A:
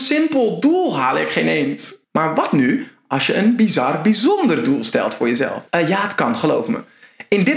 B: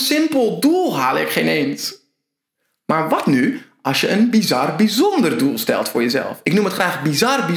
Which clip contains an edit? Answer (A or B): A